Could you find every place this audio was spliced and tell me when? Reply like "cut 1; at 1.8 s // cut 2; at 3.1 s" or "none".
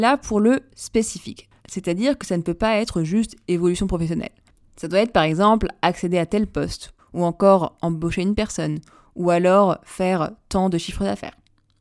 cut 1; at 1.6 s // cut 2; at 7.0 s